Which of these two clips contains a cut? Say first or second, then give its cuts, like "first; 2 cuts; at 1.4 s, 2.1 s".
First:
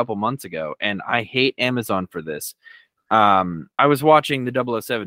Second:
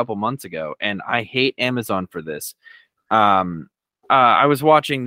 first; 1 cut; at 3.8 s